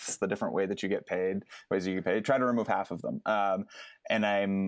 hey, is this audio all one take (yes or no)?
yes